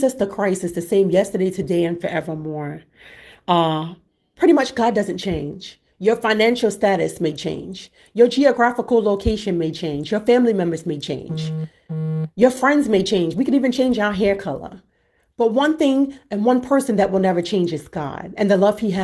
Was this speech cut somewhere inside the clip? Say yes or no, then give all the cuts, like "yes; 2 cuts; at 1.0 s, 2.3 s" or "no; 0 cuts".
no; 0 cuts